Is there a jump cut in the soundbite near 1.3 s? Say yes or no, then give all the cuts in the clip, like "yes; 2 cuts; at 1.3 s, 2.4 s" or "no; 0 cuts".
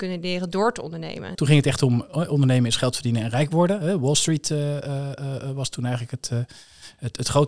yes; 1 cut; at 1.3 s